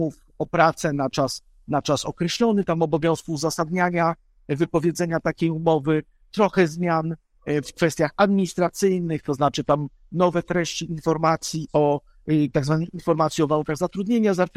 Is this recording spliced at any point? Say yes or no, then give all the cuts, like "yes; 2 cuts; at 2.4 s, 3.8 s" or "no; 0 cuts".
no; 0 cuts